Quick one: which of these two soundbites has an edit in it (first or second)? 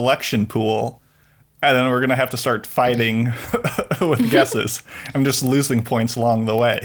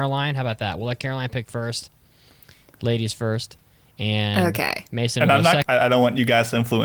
second